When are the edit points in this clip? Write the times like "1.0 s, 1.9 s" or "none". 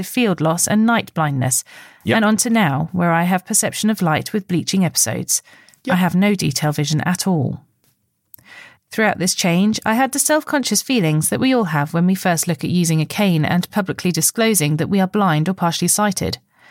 none